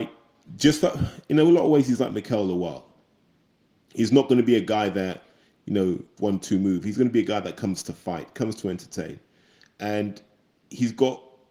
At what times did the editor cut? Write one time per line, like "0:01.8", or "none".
0:06.2